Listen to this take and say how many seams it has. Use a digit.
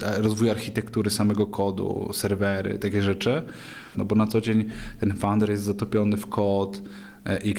2